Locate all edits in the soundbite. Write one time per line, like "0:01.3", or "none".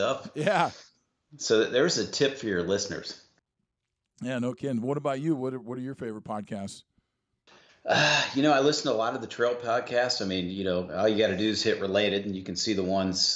none